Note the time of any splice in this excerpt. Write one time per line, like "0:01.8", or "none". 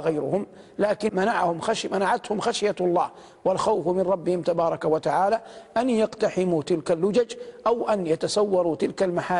0:01.1